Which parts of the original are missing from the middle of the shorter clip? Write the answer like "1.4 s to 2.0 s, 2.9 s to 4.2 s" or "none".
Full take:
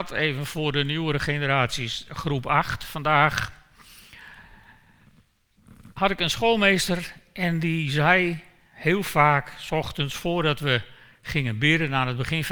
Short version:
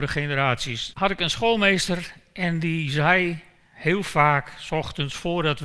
2.0 s to 5.9 s